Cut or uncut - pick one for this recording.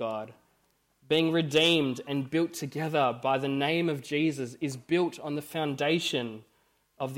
uncut